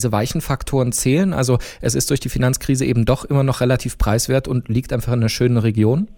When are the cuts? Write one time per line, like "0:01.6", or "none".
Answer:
none